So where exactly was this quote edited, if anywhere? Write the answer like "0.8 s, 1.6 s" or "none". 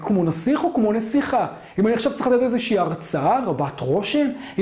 none